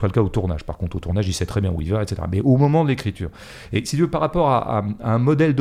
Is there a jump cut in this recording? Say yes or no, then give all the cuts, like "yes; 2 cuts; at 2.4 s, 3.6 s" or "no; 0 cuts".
no; 0 cuts